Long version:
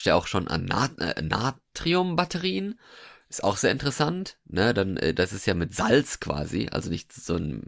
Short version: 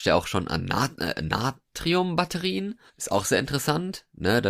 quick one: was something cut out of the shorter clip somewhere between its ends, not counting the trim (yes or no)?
yes